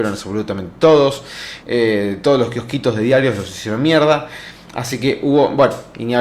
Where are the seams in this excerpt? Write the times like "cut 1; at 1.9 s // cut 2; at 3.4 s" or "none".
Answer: cut 1; at 1.6 s